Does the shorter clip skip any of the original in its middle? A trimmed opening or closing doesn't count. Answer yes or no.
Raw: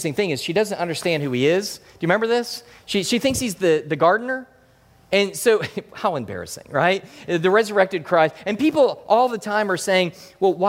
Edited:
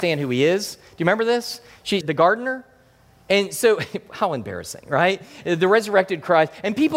yes